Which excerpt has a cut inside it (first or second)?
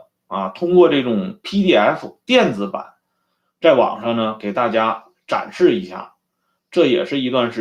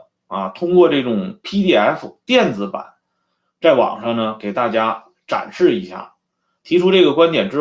second